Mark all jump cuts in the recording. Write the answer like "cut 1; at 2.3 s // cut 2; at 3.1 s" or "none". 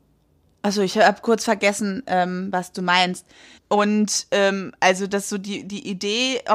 cut 1; at 3.6 s